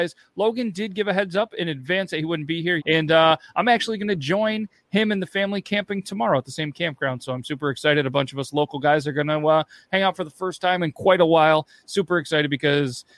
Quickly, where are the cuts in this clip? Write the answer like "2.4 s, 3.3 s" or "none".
2.8 s